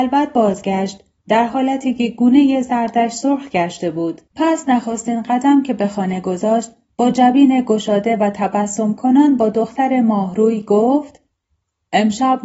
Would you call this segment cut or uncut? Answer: cut